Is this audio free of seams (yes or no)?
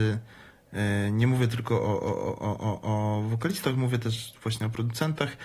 yes